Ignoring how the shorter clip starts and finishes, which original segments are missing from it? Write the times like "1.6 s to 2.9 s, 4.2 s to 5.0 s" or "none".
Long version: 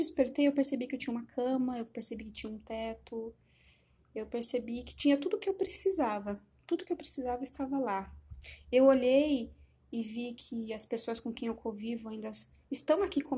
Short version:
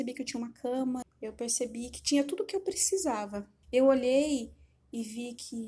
1.8 s to 4.0 s, 6.6 s to 8.6 s